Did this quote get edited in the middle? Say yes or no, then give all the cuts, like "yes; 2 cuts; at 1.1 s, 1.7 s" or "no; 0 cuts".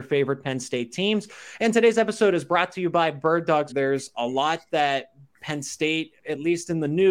yes; 2 cuts; at 3.7 s, 6.2 s